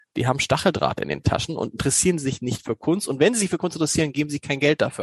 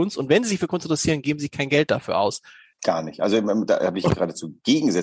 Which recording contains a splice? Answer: second; 1 cut; at 2.7 s

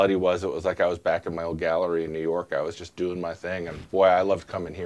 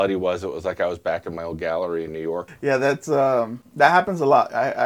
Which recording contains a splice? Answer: second; 1 cut; at 2.5 s

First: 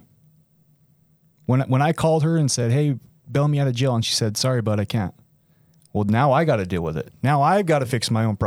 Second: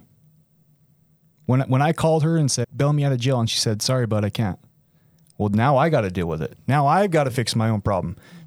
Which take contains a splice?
second; 1 cut; at 2.6 s

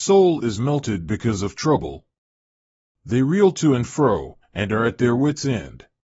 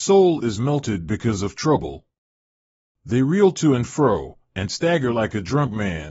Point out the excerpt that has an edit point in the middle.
first; 1 cut; at 4.4 s

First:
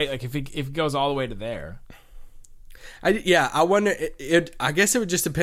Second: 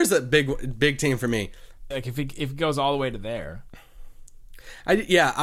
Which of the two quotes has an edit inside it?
second; 1 cut; at 1.9 s

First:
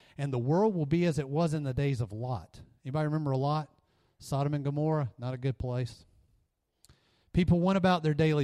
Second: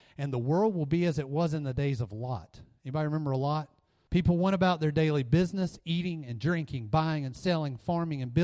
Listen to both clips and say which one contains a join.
second; 1 cut; at 4.1 s

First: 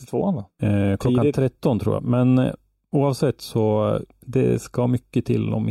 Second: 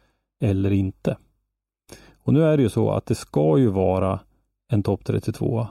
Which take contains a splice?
first; 1 cut; at 2.0 s

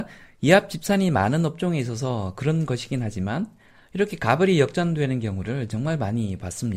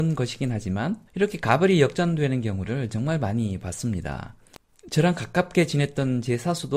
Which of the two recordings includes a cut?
second; 1 cut; at 1.1 s

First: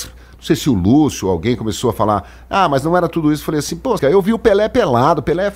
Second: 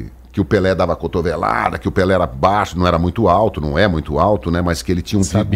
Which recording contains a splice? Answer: first; 1 cut; at 4.0 s

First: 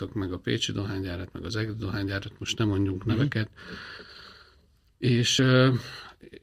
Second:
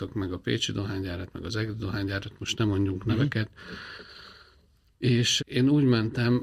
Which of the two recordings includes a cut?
second; 1 cut; at 5.4 s

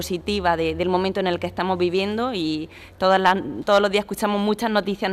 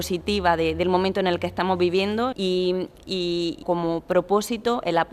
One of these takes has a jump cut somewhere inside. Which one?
second; 2 cuts; at 2.3 s, 3.6 s

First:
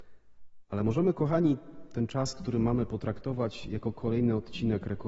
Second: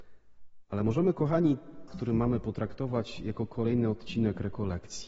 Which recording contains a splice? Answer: second; 1 cut; at 1.9 s

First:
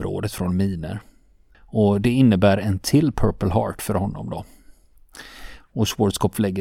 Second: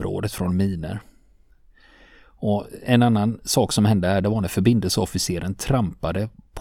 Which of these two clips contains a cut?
first; 2 cuts; at 1.5 s, 5.6 s

